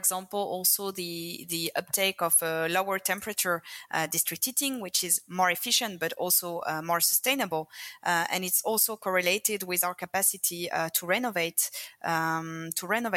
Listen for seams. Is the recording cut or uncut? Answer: uncut